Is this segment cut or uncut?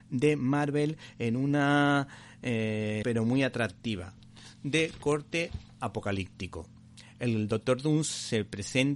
cut